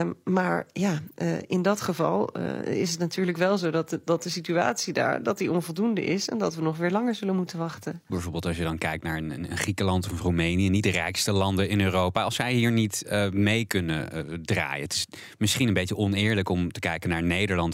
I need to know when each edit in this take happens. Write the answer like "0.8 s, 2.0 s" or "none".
8.1 s